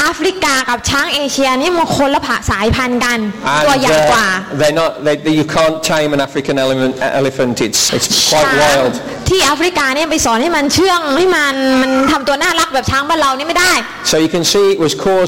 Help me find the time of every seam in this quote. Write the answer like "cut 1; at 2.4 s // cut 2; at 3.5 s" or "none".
cut 1; at 7.9 s